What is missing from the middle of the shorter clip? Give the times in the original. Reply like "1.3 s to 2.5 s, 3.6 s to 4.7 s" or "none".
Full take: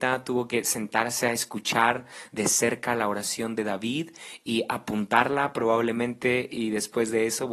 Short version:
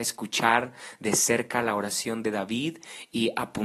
none